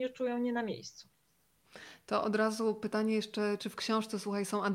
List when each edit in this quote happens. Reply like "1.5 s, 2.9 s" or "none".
none